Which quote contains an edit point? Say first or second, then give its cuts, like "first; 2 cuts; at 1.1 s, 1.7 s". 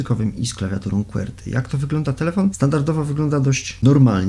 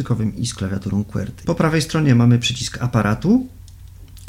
second; 1 cut; at 1.4 s